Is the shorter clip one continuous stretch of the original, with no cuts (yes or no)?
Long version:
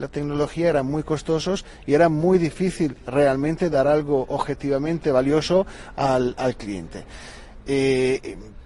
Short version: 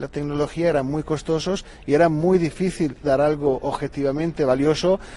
no